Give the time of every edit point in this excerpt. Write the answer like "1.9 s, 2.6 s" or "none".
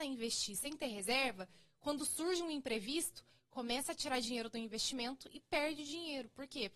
none